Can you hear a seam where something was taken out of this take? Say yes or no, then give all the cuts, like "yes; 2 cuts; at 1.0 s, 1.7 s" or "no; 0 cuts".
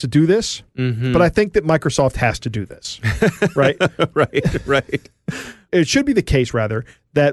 no; 0 cuts